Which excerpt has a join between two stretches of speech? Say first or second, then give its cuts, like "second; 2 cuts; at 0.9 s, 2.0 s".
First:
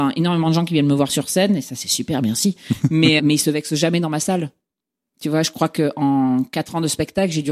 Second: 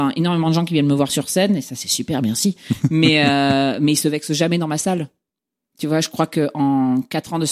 first; 1 cut; at 3.2 s